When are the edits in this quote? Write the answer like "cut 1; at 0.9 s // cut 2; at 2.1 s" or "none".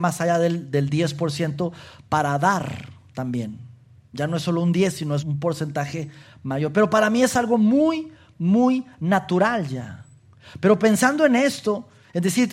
cut 1; at 5.2 s